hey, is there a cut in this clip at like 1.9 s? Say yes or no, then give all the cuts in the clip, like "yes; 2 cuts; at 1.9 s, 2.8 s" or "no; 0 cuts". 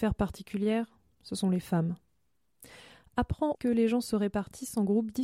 no; 1 cut; at 3.5 s